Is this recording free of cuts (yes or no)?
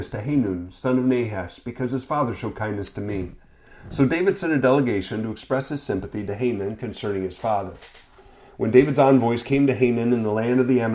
yes